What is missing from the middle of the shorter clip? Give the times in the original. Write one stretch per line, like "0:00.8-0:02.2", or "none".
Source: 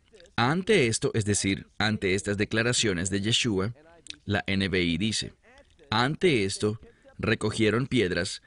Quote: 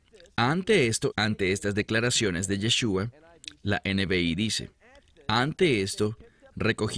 0:01.1-0:01.7

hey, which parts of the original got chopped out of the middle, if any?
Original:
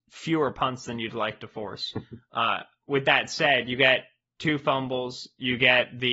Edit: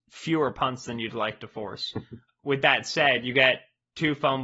0:02.3-0:02.7

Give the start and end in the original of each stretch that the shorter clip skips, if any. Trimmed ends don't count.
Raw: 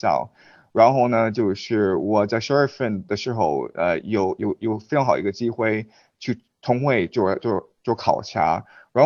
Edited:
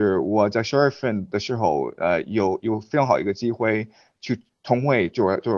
0:04.4-0:04.6

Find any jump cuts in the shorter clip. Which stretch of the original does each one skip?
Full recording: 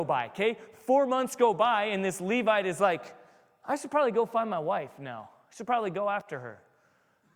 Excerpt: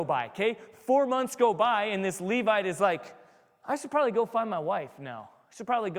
none

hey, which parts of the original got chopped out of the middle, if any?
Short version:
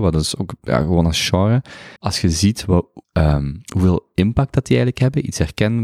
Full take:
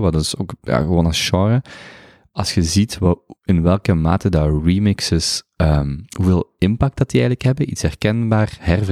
0:02.0-0:02.3
0:03.4-0:05.5

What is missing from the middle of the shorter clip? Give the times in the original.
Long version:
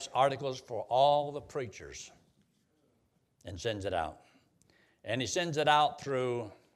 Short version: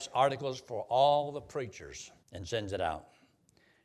0:02.2-0:03.3

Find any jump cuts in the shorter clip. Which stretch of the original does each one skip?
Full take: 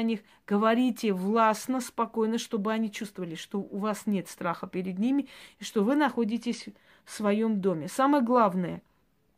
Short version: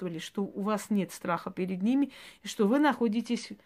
none

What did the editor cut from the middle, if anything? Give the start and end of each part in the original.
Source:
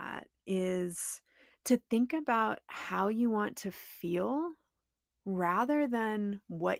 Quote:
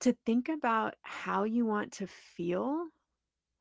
none

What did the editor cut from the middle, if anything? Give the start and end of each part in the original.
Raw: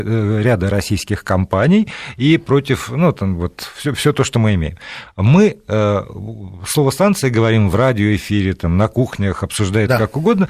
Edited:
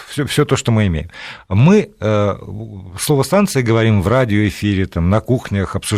none

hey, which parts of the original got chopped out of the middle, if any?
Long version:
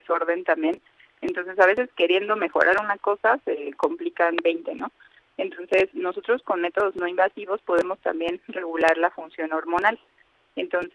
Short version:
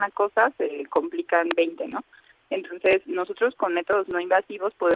none

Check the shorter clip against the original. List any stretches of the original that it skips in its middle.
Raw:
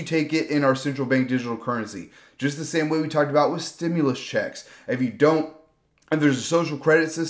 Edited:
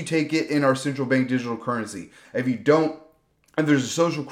0:02.2-0:04.8

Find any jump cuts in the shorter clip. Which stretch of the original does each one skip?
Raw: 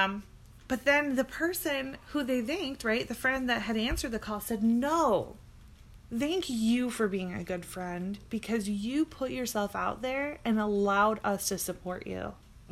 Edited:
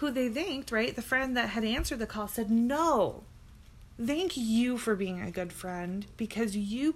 none

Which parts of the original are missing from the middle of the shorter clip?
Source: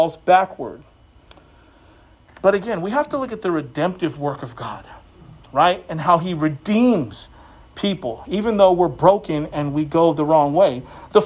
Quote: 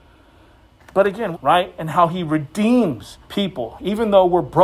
0:02.8-0:05.4
0:07.3-0:07.7

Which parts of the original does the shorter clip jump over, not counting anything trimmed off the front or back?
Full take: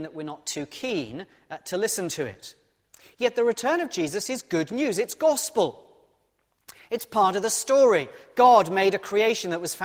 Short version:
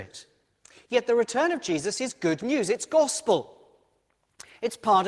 none

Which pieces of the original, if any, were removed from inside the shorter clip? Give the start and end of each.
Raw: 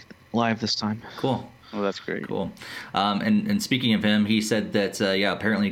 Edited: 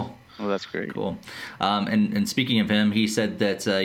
none

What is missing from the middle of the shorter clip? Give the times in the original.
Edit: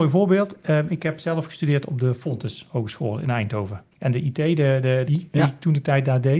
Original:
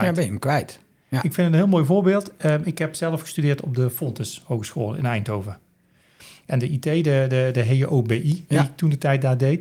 0:05.7-0:06.4
0:07.5-0:08.2

